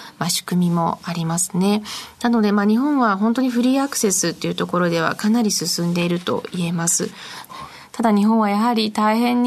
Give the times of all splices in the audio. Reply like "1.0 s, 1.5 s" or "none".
7.5 s